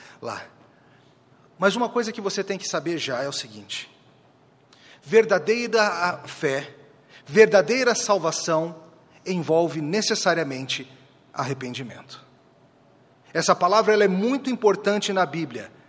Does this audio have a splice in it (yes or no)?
no